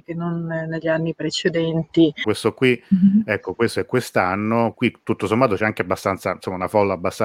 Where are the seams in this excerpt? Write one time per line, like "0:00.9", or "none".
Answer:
0:02.2
0:04.7